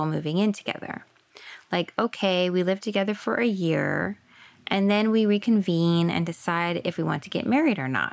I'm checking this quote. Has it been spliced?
no; 0 cuts

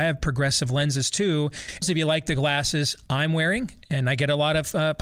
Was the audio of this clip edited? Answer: yes; 1 cut; at 1.8 s

